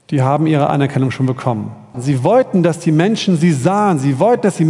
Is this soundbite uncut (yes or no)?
no